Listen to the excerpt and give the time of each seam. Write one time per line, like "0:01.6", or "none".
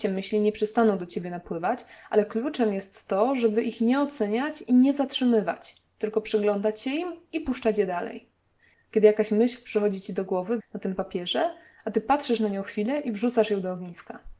0:08.7
0:10.6